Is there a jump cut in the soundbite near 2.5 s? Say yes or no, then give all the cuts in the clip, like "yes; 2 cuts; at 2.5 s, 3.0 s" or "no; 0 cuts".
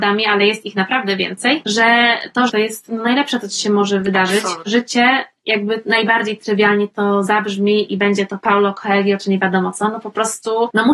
yes; 1 cut; at 2.5 s